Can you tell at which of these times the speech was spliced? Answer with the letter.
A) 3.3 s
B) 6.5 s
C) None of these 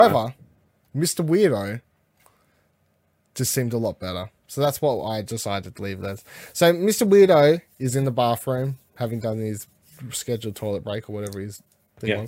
C